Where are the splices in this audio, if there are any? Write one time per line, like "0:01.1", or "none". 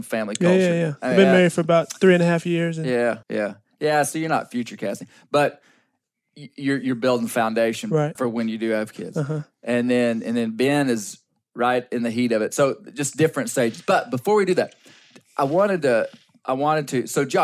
0:03.2
0:08.1